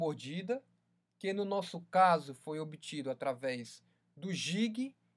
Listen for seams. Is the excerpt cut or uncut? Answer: uncut